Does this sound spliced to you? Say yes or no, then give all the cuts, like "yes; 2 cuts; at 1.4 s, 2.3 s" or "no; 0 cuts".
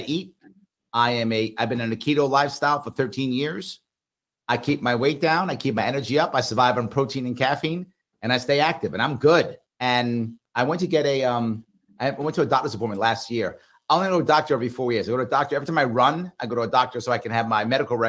yes; 1 cut; at 9.7 s